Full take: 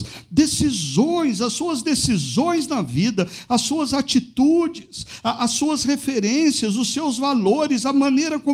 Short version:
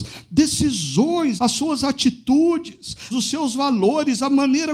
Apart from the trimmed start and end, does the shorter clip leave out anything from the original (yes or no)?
yes